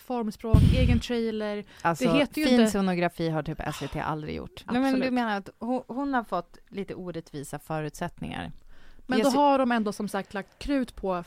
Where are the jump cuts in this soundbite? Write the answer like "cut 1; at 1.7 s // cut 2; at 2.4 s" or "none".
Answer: cut 1; at 4.6 s